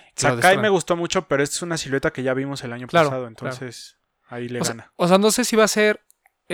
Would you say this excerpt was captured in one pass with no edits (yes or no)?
yes